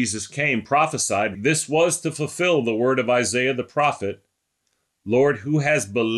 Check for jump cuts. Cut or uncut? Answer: cut